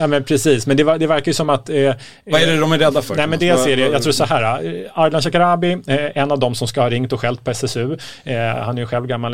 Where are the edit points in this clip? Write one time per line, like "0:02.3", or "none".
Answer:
none